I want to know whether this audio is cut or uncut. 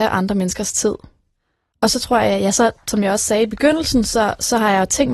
uncut